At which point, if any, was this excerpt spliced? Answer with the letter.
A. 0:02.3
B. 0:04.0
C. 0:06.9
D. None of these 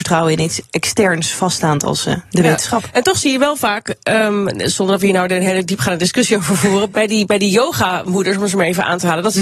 C